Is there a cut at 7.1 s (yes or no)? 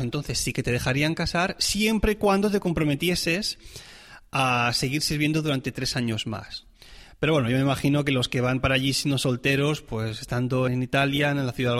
no